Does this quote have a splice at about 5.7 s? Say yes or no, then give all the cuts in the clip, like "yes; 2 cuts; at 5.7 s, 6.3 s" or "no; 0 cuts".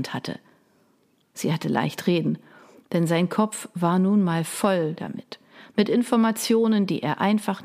no; 1 cut; at 1.2 s